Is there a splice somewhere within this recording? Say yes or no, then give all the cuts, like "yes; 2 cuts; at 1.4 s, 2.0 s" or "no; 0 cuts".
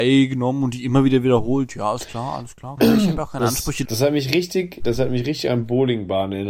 yes; 2 cuts; at 2.8 s, 3.9 s